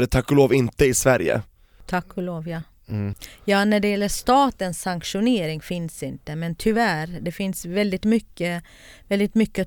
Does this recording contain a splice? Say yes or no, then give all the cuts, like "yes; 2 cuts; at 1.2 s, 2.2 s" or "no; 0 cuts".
no; 0 cuts